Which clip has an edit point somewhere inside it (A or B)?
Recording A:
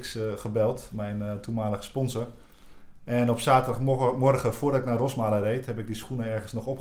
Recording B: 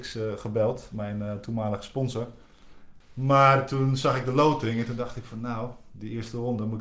B